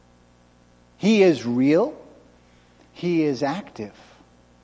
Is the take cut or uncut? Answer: uncut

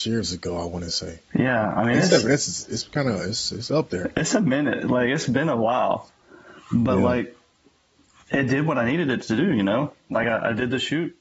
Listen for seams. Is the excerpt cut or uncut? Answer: uncut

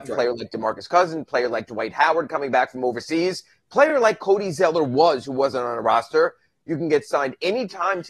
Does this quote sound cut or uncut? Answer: uncut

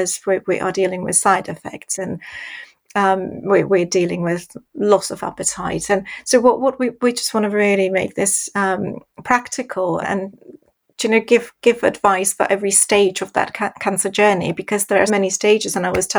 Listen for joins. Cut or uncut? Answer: cut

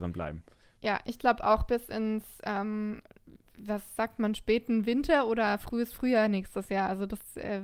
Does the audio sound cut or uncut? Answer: uncut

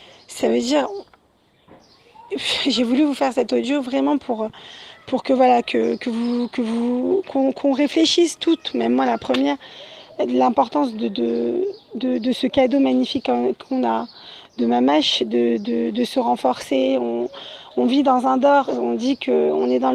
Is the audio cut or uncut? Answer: uncut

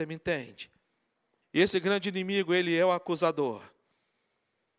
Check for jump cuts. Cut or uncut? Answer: cut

